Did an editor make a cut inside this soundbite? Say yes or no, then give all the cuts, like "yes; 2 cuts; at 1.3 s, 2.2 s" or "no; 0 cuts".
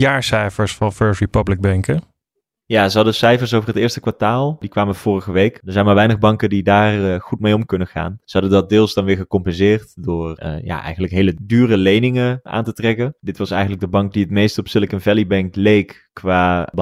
yes; 2 cuts; at 5.6 s, 13.2 s